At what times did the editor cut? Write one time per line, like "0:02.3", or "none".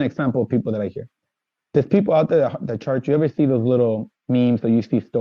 none